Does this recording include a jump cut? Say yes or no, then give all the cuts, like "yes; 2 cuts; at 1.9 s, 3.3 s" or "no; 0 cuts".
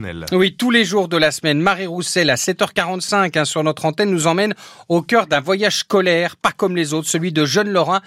no; 0 cuts